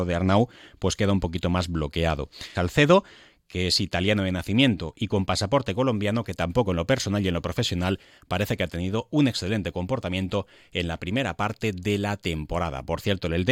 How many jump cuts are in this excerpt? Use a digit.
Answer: 1